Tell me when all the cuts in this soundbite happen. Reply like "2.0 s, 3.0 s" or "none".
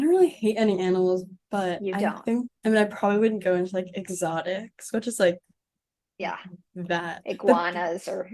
2.5 s